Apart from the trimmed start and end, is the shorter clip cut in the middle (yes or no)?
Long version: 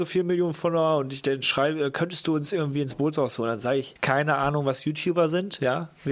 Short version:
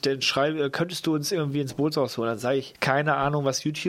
no